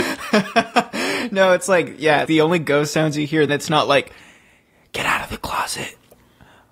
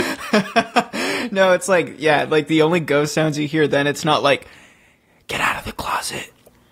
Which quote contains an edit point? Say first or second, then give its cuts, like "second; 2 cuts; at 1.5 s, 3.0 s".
first; 2 cuts; at 2.3 s, 3.5 s